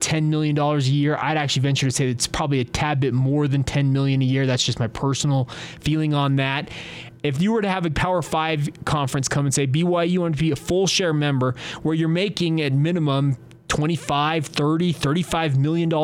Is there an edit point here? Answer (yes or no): no